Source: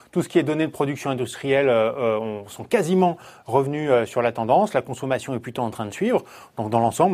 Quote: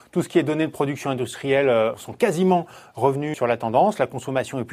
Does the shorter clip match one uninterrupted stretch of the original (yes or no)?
no